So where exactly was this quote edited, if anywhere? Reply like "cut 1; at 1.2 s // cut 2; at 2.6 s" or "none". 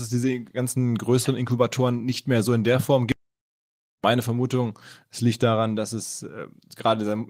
none